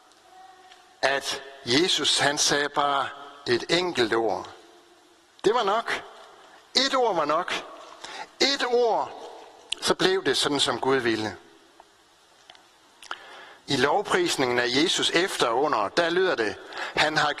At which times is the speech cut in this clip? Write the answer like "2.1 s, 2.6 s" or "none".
none